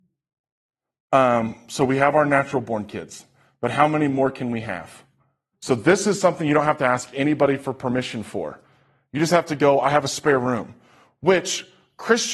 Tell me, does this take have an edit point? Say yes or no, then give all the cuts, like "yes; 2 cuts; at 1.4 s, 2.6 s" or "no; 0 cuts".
yes; 1 cut; at 5.5 s